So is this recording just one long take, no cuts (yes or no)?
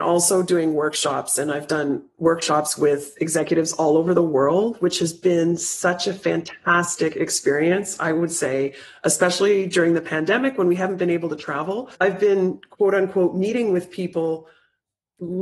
no